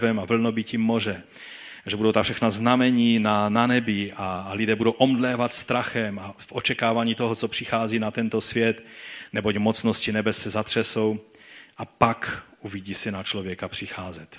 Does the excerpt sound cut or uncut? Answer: uncut